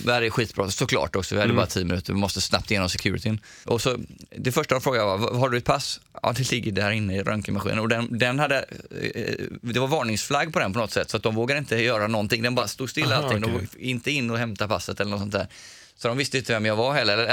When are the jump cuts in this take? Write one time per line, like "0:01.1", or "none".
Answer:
0:03.6